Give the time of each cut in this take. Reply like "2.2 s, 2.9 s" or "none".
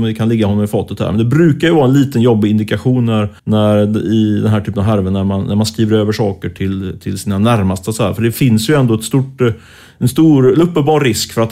3.4 s